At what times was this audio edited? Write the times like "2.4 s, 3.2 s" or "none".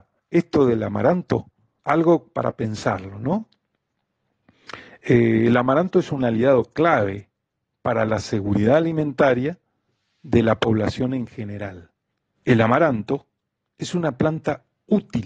1.8 s, 12.3 s